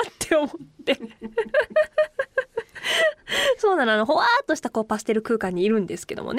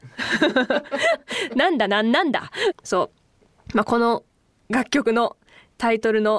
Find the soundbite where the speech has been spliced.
second; 1 cut; at 2.7 s

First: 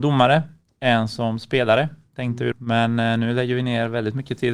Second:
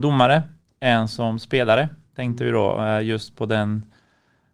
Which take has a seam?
first; 1 cut; at 2.5 s

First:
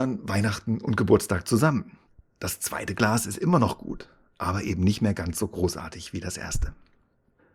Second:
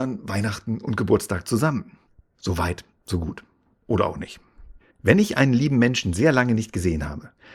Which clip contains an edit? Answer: second; 2 cuts; at 2.3 s, 4.9 s

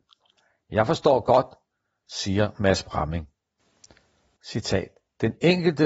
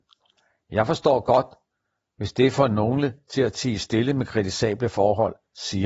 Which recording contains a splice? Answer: first; 2 cuts; at 2.0 s, 4.4 s

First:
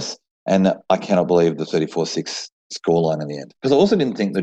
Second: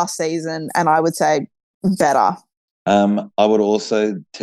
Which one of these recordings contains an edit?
second; 1 cut; at 2.7 s

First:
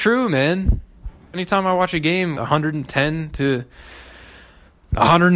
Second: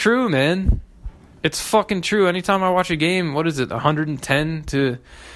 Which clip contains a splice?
first; 2 cuts; at 1.3 s, 2.3 s

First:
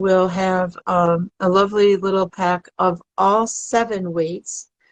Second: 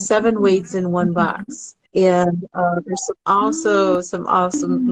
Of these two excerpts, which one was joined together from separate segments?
second; 1 cut; at 1.9 s

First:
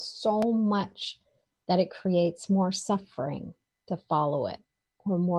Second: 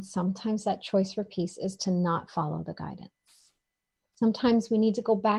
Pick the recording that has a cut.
second; 1 cut; at 4.0 s

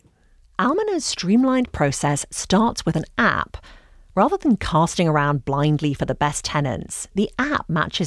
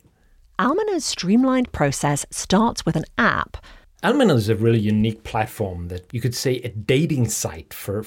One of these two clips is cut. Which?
second; 2 cuts; at 3.8 s, 6.1 s

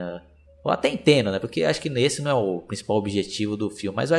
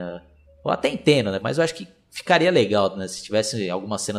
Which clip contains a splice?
second; 1 cut; at 1.4 s

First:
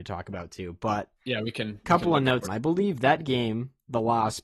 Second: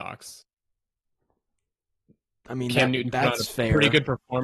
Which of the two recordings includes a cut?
first; 1 cut; at 2.4 s

